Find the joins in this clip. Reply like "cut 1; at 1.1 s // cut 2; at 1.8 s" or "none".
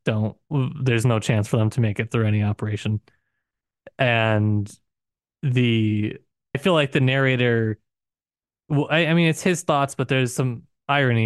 cut 1; at 6.5 s